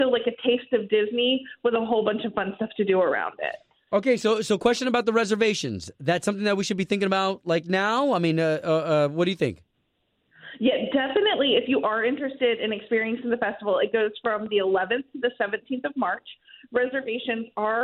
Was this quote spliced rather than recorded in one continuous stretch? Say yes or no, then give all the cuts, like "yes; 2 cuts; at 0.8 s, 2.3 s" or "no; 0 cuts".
no; 0 cuts